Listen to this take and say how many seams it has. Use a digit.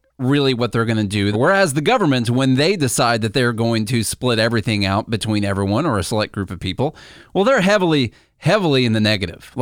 1